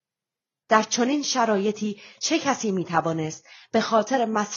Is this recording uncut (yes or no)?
yes